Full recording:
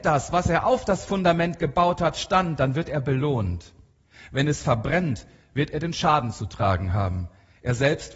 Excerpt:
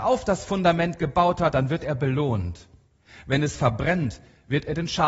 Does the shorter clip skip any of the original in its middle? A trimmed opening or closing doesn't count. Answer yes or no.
yes